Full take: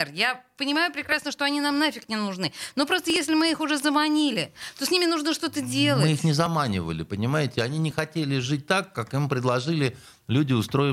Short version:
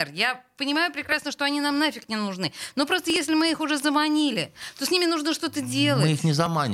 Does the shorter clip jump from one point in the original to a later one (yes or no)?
no